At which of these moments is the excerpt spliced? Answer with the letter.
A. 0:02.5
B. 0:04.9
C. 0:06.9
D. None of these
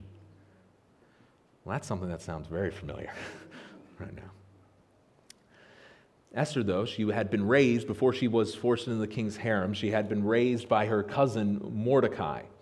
D